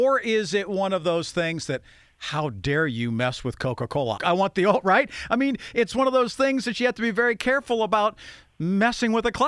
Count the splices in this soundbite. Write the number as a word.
one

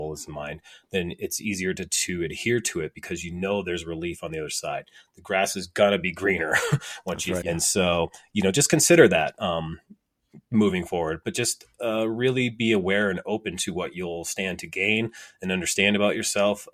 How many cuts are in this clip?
one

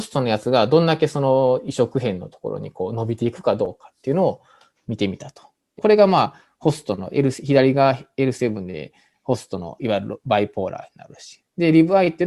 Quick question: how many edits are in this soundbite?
two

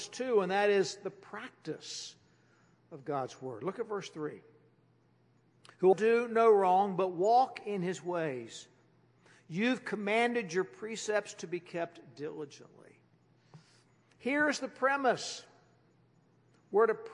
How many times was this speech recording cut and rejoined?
one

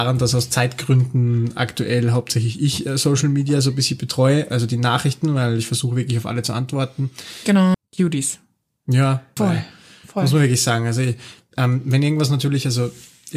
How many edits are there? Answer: two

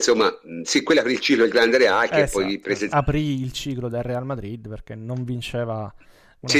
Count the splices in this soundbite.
one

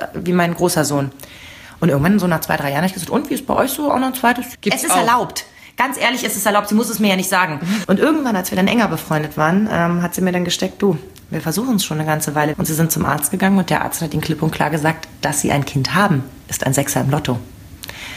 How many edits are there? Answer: three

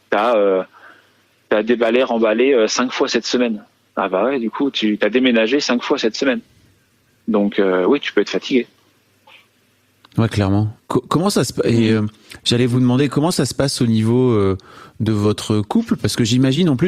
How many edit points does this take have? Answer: zero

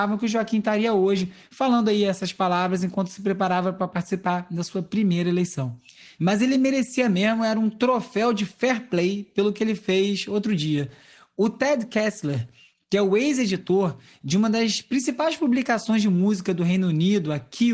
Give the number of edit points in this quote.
one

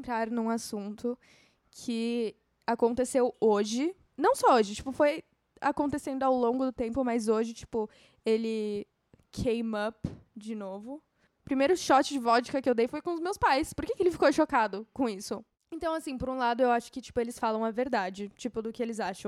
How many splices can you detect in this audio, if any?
two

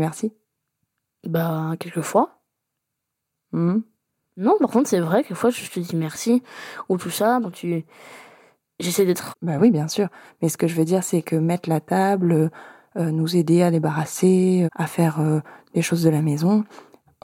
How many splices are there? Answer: three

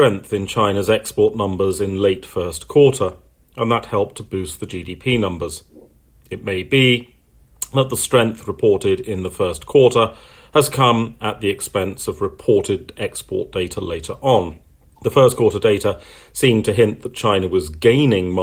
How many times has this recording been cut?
one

